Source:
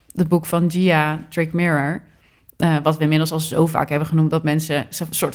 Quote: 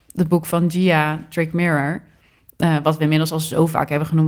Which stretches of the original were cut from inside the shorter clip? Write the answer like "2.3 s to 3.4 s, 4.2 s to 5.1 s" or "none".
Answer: none